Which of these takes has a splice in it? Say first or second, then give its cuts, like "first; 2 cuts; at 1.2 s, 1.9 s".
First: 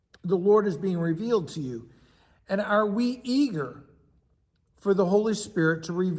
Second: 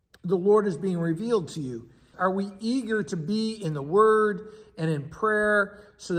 second; 1 cut; at 2.1 s